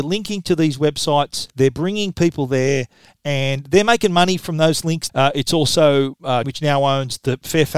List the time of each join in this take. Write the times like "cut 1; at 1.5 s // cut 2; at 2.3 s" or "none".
cut 1; at 1.5 s // cut 2; at 5.1 s // cut 3; at 6.4 s